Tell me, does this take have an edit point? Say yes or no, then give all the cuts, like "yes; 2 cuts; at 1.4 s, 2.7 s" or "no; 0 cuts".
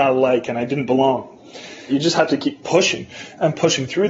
yes; 1 cut; at 1.9 s